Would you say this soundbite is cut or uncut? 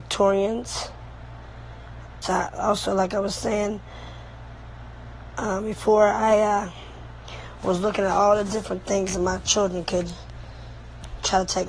cut